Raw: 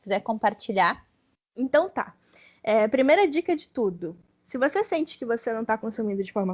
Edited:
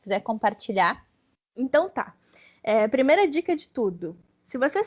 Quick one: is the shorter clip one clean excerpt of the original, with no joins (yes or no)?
yes